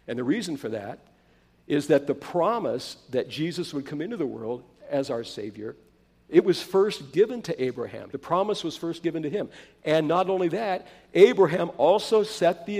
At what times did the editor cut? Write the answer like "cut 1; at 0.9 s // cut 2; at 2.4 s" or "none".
cut 1; at 8.1 s